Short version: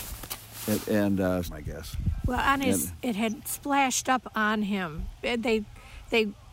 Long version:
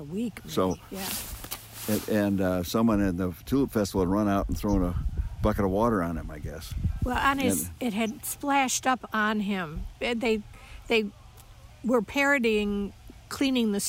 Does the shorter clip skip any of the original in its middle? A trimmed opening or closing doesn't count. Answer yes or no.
yes